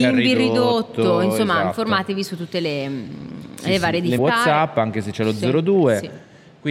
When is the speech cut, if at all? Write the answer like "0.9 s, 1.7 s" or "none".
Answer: 4.2 s